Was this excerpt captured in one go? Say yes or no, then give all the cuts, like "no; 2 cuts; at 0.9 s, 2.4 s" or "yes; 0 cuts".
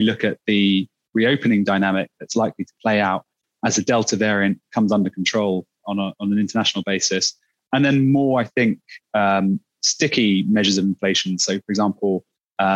no; 1 cut; at 5.8 s